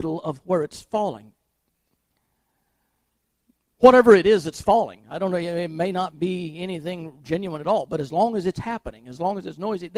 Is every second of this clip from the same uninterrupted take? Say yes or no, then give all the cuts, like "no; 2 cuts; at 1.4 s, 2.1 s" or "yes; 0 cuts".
yes; 0 cuts